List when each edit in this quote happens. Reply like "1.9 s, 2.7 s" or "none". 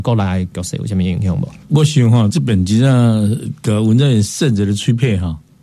none